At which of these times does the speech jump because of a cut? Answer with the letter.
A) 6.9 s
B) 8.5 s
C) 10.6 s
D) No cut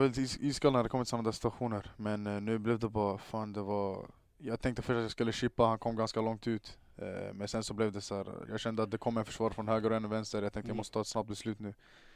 B